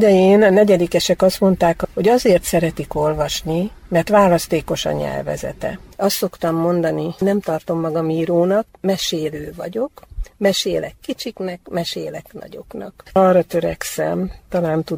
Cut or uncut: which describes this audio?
uncut